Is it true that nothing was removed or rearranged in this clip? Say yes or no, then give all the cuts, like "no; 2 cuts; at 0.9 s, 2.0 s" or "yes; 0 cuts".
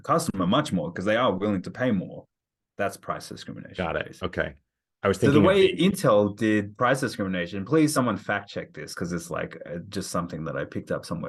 yes; 0 cuts